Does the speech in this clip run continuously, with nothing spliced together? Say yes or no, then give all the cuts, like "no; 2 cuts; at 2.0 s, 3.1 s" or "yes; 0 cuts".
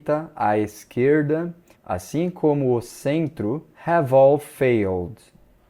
no; 2 cuts; at 1.7 s, 3.7 s